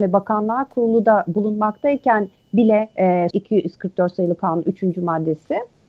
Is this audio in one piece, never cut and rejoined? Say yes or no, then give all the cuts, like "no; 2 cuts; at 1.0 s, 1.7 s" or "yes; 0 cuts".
no; 1 cut; at 3.3 s